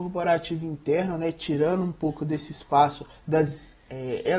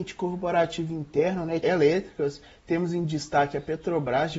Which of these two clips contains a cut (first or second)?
second